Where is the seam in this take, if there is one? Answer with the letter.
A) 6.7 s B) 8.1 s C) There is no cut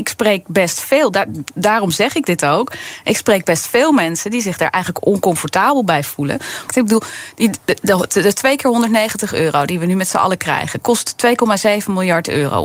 A